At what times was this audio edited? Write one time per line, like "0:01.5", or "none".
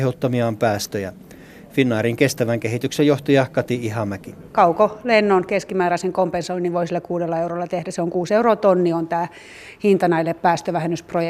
none